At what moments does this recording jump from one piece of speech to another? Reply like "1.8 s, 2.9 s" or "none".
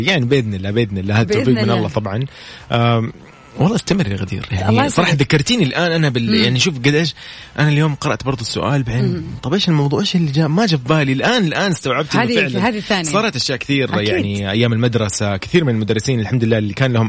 none